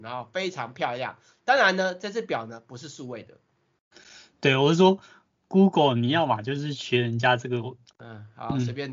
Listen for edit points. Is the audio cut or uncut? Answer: cut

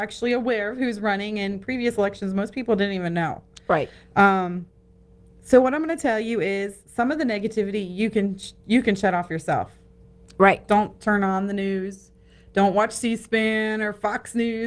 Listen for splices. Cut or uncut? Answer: uncut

